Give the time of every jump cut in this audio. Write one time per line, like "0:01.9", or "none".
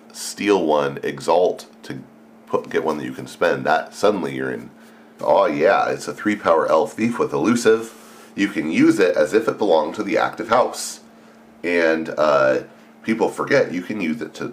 0:05.2